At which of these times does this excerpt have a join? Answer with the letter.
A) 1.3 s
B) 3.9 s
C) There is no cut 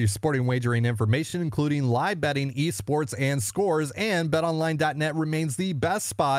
C